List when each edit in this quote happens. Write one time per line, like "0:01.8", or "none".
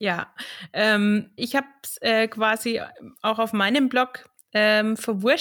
0:01.4